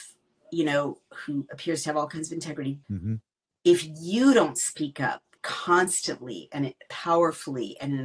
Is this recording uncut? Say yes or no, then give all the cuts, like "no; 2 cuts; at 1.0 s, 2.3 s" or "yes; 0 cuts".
no; 2 cuts; at 2.8 s, 5.4 s